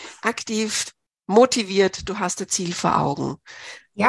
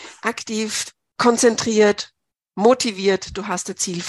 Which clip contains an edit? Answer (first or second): first